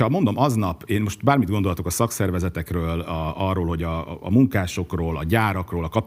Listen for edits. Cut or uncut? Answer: uncut